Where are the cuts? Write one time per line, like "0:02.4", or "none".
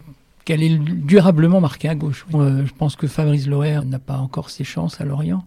0:02.3
0:03.8